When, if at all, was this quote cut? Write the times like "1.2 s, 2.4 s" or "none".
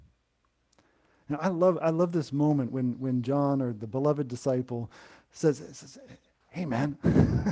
none